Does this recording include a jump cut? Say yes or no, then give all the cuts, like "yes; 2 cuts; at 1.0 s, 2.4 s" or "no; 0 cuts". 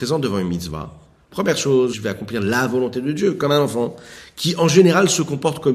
yes; 1 cut; at 1.9 s